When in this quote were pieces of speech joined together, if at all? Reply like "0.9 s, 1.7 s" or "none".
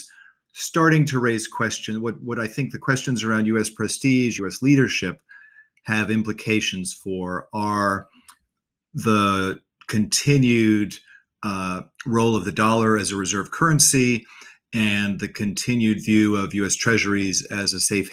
4.4 s

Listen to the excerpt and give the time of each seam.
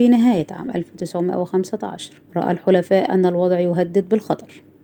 2.3 s

